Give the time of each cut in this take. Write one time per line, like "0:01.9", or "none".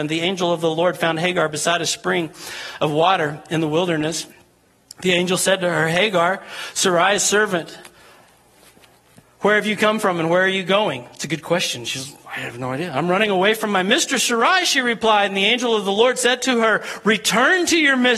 none